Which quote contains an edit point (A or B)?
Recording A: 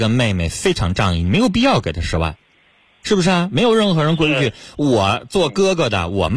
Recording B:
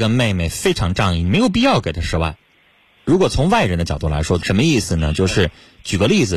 B